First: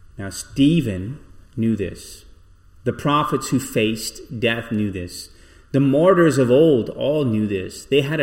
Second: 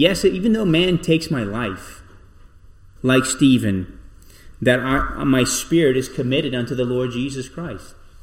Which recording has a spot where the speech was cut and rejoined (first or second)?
second